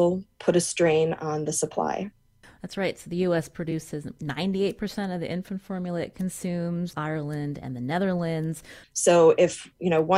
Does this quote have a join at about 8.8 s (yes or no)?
yes